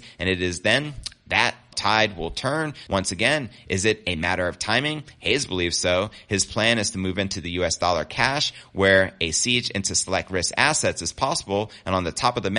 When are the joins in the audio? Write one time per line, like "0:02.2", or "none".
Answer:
0:01.7
0:02.9